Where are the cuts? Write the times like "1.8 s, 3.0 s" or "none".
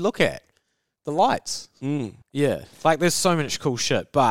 2.2 s

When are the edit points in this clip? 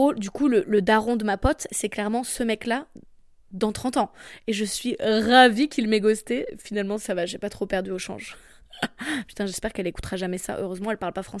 none

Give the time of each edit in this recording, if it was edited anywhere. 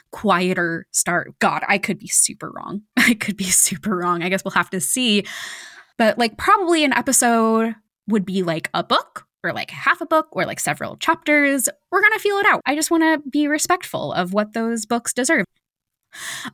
12.6 s, 15.4 s

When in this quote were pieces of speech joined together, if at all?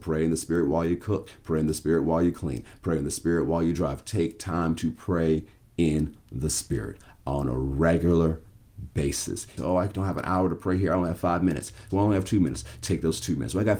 9.6 s, 11.9 s

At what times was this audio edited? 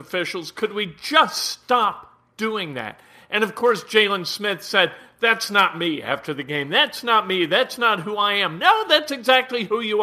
none

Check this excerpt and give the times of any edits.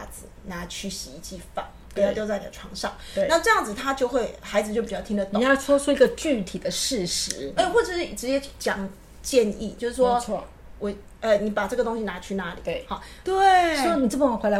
7.6 s, 13.2 s

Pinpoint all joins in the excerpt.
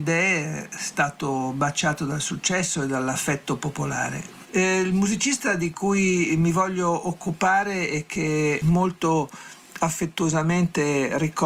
4.5 s, 8.6 s

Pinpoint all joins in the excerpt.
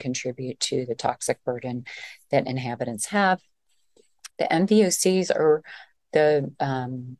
4.3 s

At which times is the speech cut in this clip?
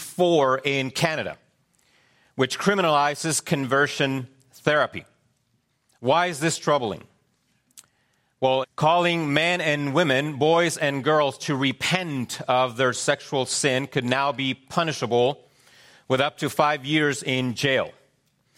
8.6 s

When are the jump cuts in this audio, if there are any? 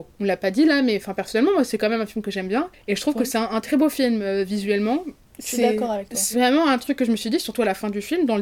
none

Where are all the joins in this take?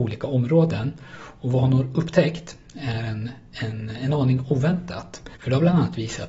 none

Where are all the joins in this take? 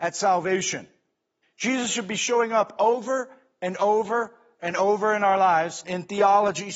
1.4 s, 5.8 s

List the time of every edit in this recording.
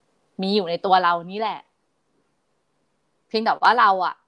none

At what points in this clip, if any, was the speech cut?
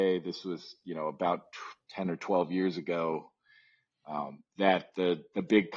none

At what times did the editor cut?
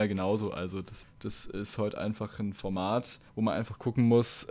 1.0 s, 3.3 s

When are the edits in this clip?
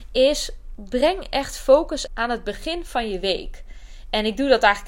2.1 s

